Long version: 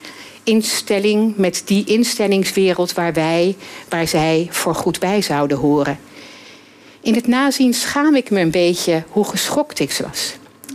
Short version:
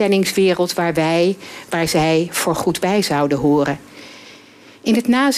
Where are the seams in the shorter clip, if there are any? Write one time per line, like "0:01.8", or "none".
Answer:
none